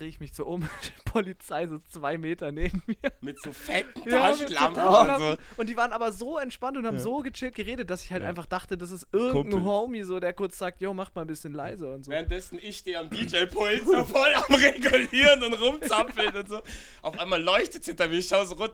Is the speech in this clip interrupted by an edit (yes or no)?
no